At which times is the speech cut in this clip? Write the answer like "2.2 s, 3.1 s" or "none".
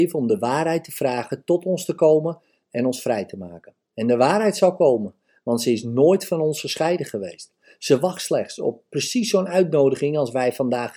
none